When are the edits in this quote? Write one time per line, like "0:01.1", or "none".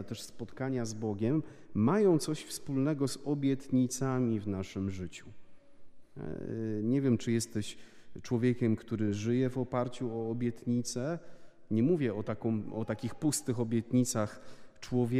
none